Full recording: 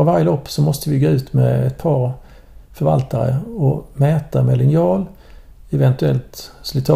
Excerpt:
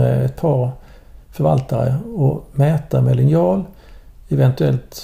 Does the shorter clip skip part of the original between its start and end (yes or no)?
no